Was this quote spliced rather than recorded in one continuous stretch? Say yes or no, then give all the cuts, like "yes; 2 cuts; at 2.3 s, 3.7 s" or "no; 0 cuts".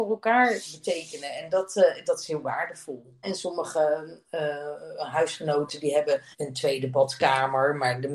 yes; 2 cuts; at 3.2 s, 6.3 s